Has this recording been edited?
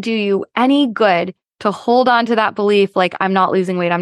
no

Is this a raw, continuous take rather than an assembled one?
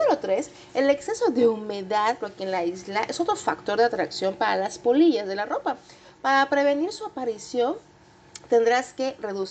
no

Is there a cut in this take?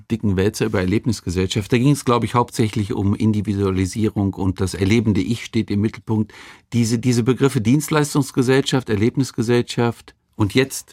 no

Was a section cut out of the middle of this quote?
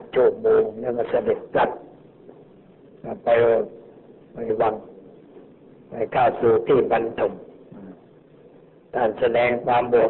no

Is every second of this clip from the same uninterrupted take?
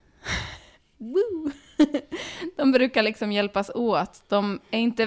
yes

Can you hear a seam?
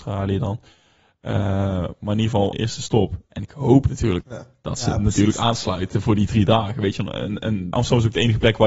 yes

